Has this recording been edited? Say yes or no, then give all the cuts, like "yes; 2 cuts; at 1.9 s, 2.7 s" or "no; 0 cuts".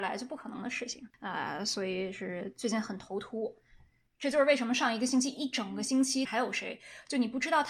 yes; 2 cuts; at 1.1 s, 6.3 s